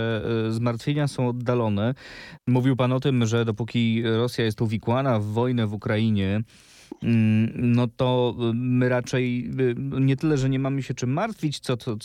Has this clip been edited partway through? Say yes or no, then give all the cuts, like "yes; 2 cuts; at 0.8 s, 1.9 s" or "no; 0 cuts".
yes; 1 cut; at 2.4 s